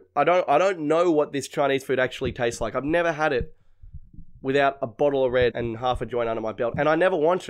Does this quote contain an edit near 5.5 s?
yes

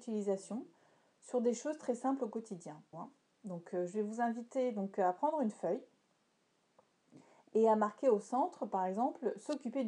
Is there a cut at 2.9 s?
yes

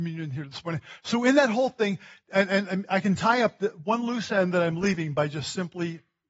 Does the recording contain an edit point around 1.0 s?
no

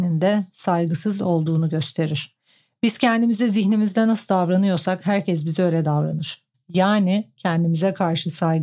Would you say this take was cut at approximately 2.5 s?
no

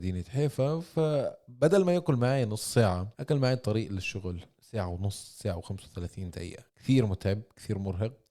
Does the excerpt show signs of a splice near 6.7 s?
yes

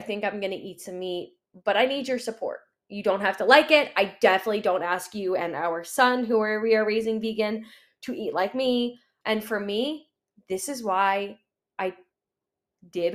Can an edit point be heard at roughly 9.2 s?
yes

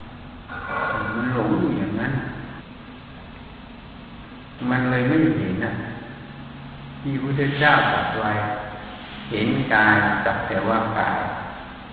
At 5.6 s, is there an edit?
yes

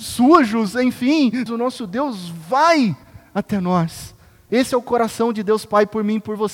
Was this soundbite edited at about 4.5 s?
yes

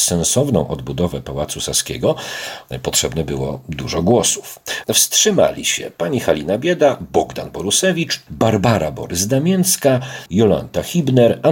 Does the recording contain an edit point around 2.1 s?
no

